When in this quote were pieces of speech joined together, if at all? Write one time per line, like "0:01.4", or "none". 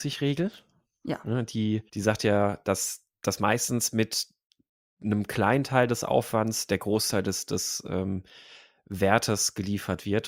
0:01.9